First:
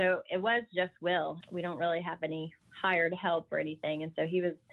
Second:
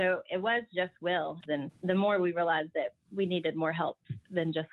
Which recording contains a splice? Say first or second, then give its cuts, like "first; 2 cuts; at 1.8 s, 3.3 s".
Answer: second; 1 cut; at 1.5 s